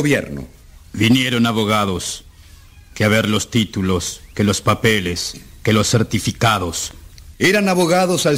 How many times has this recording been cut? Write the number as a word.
one